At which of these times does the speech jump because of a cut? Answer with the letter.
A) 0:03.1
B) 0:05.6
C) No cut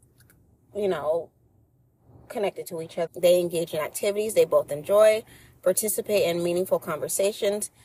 A